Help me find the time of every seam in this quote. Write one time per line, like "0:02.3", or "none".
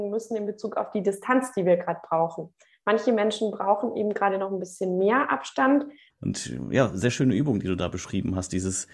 0:06.1